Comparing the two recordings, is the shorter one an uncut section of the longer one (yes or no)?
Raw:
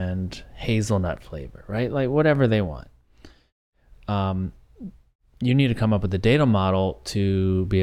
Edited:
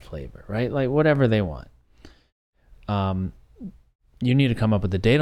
yes